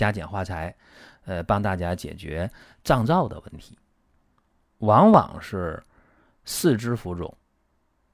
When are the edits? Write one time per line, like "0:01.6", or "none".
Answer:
0:04.6